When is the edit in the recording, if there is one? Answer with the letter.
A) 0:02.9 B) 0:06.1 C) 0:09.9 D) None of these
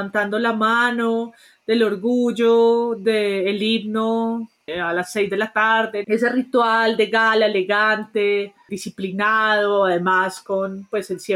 B